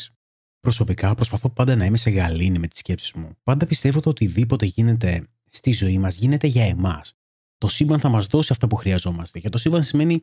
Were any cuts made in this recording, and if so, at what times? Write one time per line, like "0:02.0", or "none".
0:03.4
0:07.4